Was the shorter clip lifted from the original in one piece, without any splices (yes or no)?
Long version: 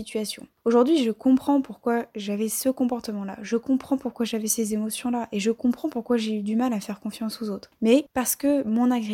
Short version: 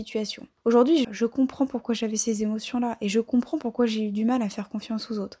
no